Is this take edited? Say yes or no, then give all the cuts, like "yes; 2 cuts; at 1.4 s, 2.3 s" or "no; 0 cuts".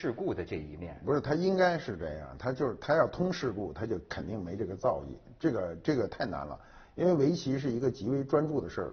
no; 0 cuts